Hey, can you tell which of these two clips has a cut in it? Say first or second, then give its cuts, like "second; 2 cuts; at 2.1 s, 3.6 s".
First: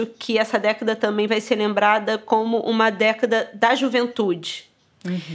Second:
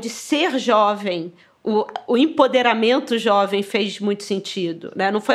first; 1 cut; at 1.3 s